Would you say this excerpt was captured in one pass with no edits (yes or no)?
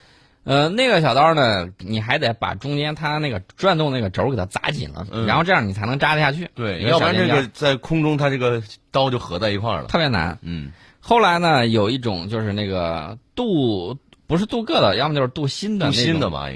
yes